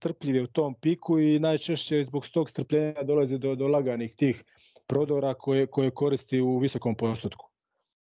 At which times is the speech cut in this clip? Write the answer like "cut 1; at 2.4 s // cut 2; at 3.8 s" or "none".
none